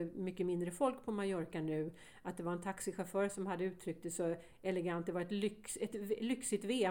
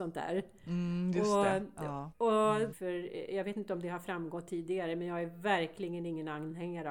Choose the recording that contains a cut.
second; 1 cut; at 2.7 s

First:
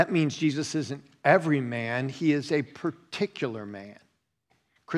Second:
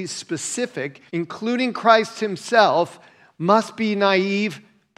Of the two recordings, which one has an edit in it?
second; 1 cut; at 1.1 s

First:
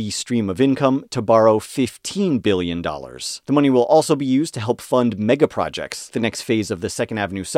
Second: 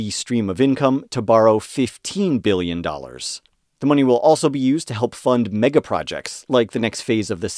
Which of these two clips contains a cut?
first; 2 cuts; at 3.4 s, 6.1 s

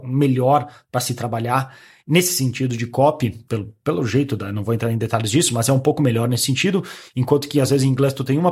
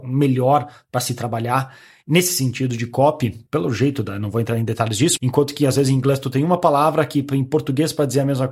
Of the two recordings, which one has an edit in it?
second; 2 cuts; at 3.5 s, 5.2 s

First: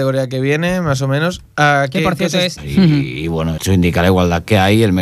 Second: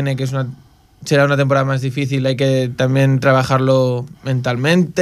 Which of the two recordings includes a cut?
first; 2 cuts; at 2.6 s, 3.6 s

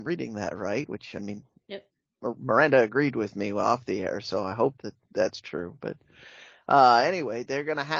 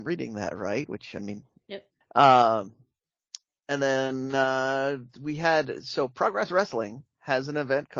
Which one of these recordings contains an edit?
second; 1 cut; at 2.0 s

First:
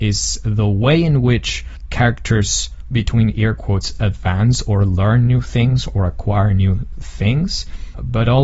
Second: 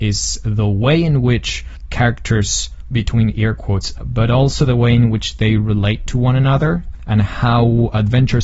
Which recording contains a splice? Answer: second; 1 cut; at 3.9 s

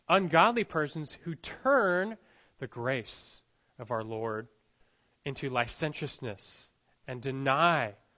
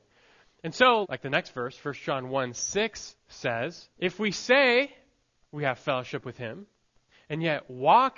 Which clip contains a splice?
second; 2 cuts; at 1.0 s, 3.9 s

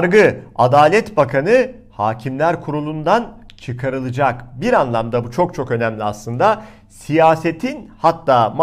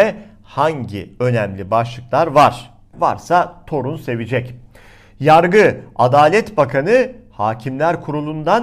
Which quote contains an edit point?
second; 1 cut; at 2.9 s

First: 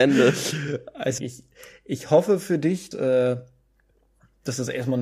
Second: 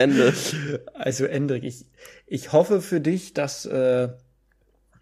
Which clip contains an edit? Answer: first; 2 cuts; at 1.2 s, 2.9 s

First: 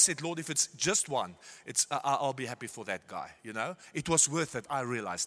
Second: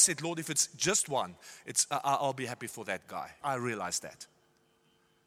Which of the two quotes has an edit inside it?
second; 1 cut; at 3.4 s

